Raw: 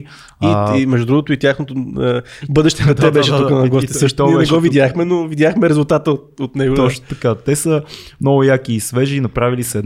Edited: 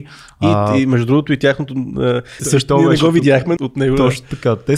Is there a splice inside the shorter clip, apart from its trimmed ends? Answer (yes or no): yes